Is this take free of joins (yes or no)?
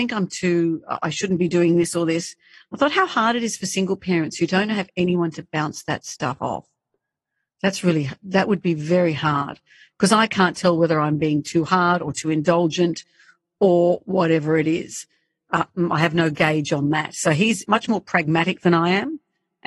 yes